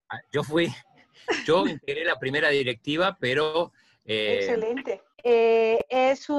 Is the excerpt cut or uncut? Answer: cut